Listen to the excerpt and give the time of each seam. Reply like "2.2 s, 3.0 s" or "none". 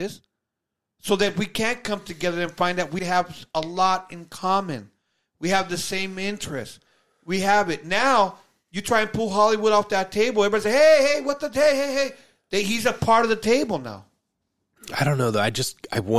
3.0 s